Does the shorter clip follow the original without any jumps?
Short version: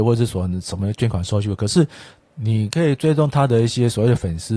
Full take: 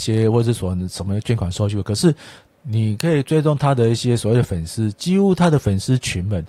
yes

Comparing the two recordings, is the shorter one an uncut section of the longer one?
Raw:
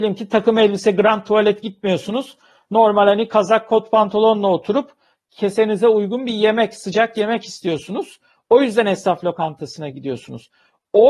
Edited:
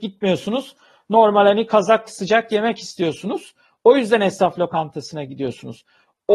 no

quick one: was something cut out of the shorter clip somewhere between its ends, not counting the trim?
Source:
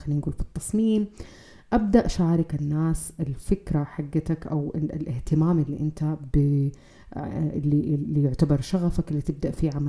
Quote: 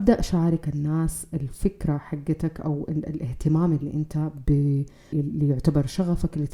yes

